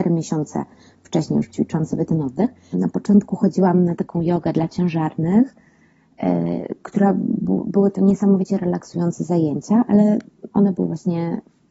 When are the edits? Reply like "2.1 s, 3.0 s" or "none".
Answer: 2.7 s